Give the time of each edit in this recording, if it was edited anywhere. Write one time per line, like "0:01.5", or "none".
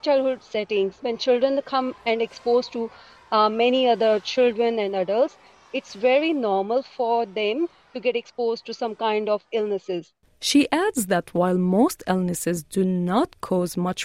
none